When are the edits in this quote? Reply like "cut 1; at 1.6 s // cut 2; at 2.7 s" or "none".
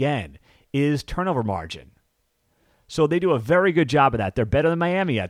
none